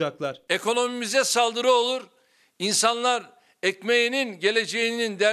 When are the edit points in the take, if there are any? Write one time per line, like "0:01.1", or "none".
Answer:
none